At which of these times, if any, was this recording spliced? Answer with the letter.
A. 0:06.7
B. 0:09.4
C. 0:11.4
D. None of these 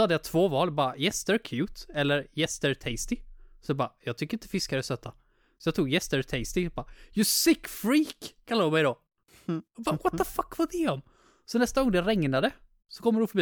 D